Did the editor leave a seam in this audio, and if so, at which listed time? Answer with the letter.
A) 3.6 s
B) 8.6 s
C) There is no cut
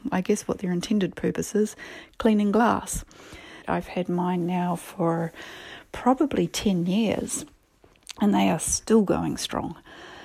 A